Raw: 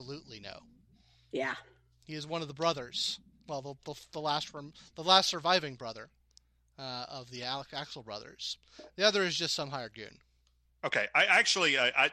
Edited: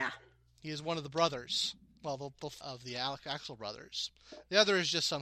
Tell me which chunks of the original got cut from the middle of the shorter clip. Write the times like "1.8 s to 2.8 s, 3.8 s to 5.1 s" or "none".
4.0 s to 7.1 s